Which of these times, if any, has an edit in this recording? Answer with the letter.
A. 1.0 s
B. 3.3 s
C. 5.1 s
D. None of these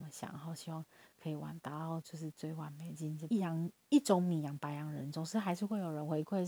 B